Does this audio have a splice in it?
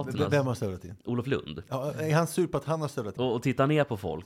yes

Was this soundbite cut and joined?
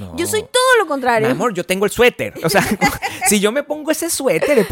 yes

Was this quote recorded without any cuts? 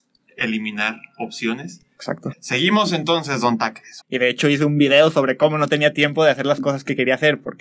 no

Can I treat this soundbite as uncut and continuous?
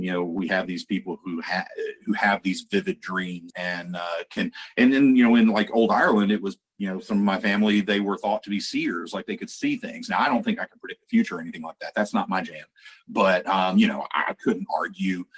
no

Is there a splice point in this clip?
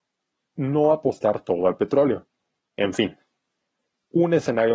yes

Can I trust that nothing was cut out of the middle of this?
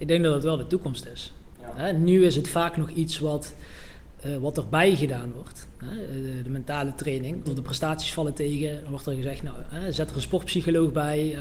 no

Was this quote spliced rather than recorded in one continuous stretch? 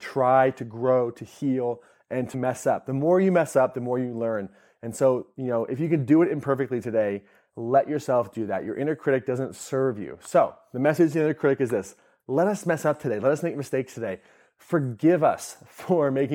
yes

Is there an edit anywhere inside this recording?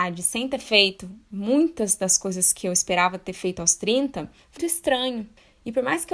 yes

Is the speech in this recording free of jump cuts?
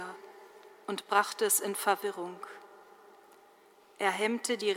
yes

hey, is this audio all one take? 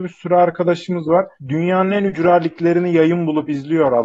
no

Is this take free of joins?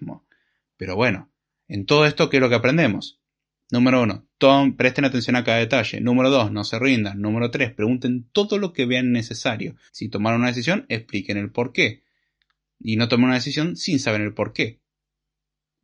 no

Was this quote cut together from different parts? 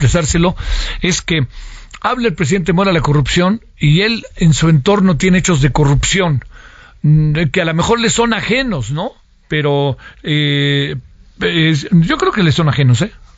no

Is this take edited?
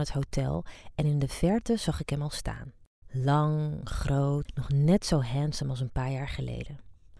yes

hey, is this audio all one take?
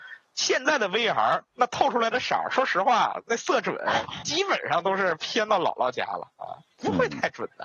yes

